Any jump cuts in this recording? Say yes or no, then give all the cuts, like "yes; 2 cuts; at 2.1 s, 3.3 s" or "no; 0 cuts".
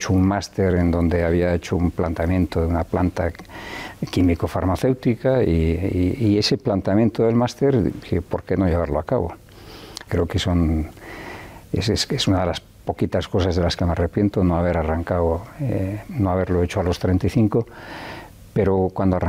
yes; 2 cuts; at 10.1 s, 16.1 s